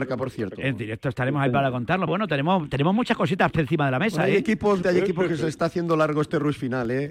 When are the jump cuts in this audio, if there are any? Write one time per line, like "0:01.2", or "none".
0:02.1
0:04.8